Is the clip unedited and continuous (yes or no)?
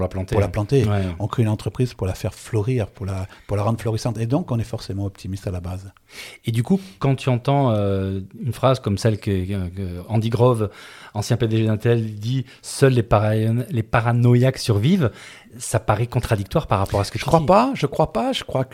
yes